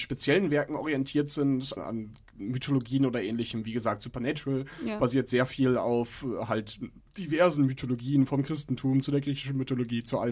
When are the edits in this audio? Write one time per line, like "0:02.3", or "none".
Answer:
0:01.8

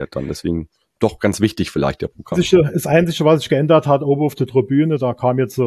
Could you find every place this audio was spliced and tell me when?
0:02.3

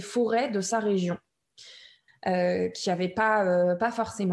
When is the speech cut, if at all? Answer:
0:02.1

